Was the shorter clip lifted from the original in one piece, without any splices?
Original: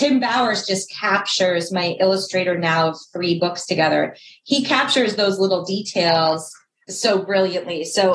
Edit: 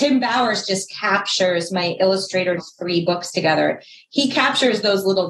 no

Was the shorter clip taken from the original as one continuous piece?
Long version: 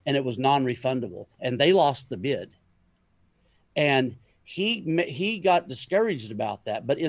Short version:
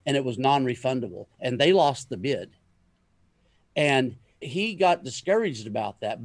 no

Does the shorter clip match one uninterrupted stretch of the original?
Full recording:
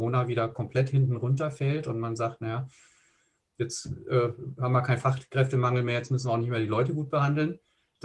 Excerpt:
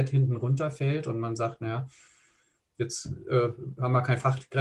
yes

